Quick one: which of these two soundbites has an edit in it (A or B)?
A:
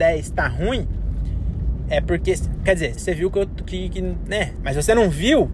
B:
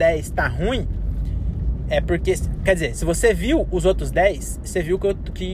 A